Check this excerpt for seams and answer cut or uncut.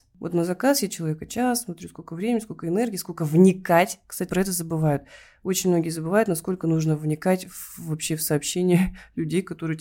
cut